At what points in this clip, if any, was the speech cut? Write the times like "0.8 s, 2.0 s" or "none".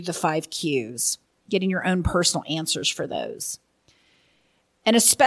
none